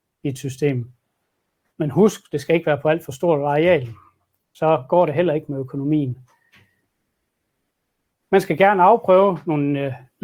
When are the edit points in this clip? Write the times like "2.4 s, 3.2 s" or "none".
1.7 s, 8.2 s